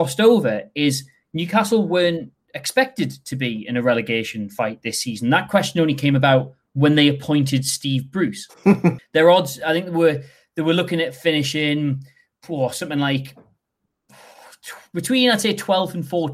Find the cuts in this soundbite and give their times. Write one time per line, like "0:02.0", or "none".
0:09.0